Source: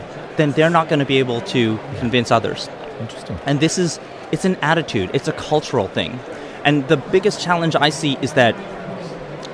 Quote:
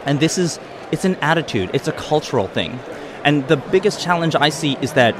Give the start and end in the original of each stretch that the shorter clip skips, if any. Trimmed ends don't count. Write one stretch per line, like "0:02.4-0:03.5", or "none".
none